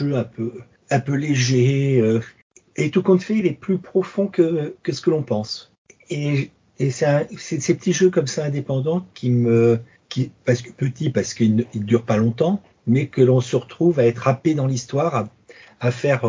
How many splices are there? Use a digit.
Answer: 0